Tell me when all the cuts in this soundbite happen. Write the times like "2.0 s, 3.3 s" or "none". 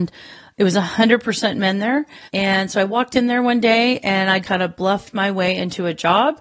2.3 s, 4.4 s